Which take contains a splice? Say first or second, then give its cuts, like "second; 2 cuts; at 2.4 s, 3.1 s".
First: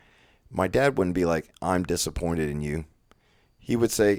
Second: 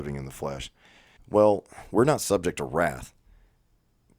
second; 1 cut; at 1.2 s